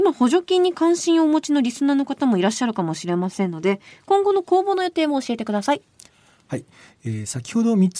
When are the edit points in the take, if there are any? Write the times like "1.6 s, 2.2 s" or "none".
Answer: none